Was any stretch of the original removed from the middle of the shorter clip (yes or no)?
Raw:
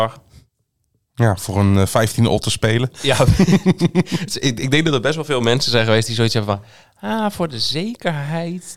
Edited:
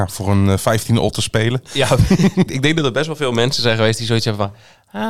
yes